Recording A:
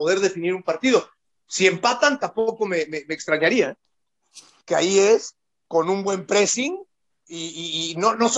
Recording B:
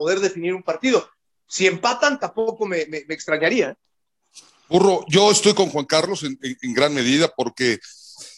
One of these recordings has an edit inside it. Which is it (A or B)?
A